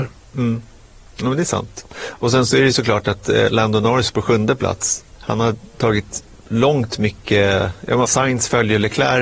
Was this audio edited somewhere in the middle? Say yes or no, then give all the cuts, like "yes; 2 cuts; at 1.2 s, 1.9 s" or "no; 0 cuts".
yes; 2 cuts; at 5.2 s, 8.0 s